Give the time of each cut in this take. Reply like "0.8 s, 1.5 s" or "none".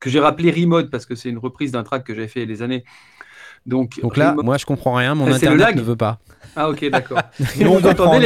4.4 s